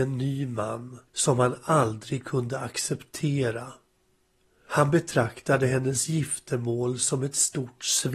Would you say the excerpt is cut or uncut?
cut